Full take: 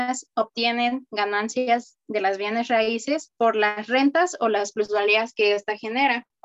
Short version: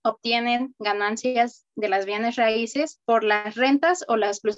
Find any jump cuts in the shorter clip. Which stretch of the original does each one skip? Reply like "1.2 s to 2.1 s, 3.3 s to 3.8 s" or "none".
none